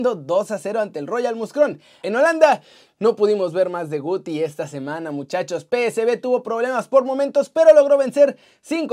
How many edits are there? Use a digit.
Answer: 1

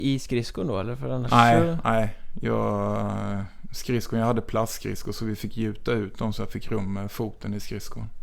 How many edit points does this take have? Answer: 0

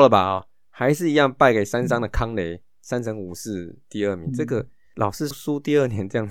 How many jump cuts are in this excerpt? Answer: 1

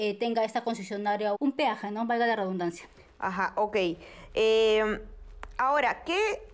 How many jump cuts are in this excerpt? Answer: 1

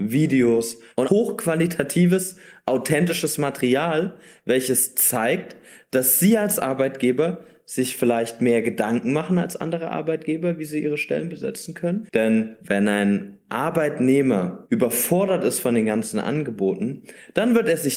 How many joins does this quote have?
2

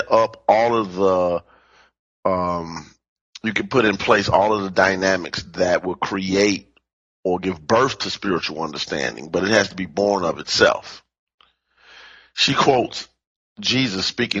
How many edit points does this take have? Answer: 0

